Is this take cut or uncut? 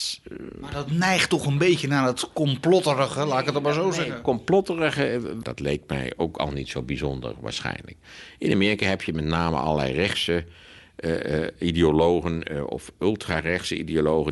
cut